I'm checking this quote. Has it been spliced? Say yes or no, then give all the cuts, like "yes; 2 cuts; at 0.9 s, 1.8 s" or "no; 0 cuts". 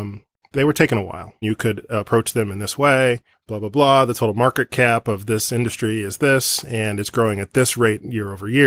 yes; 1 cut; at 1.4 s